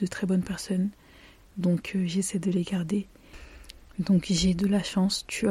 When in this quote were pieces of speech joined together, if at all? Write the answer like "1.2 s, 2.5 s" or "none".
none